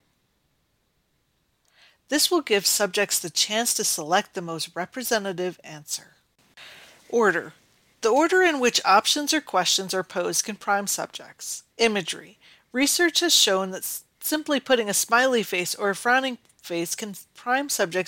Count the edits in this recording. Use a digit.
1